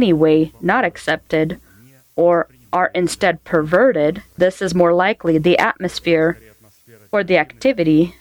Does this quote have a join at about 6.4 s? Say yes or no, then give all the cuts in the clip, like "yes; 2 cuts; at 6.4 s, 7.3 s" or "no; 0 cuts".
no; 1 cut; at 4.4 s